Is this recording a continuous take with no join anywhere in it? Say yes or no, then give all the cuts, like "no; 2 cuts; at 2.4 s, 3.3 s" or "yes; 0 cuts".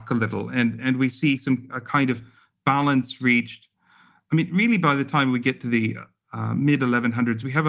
yes; 0 cuts